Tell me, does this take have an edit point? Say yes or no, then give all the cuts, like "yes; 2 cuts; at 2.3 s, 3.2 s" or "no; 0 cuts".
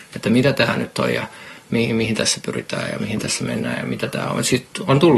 no; 0 cuts